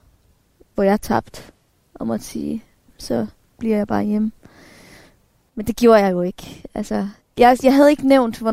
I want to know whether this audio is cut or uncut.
cut